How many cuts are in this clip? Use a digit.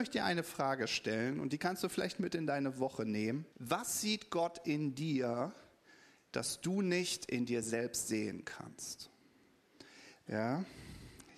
2